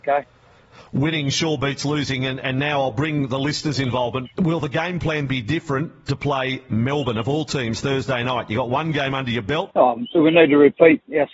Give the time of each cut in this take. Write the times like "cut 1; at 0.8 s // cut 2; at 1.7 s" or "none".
cut 1; at 4.2 s // cut 2; at 5.3 s // cut 3; at 9.7 s